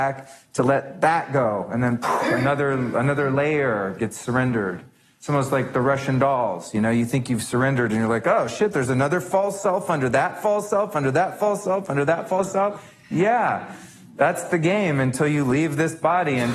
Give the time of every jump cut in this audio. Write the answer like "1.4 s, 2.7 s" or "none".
none

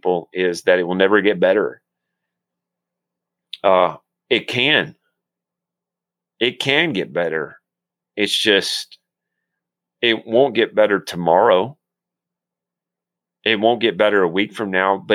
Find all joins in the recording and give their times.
none

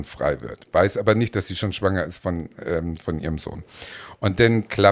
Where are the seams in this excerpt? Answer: none

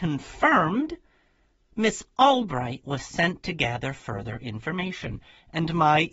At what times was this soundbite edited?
none

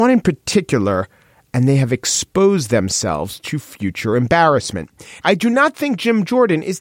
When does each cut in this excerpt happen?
5.2 s

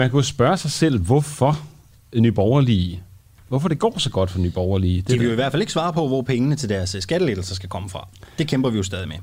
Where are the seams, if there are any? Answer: none

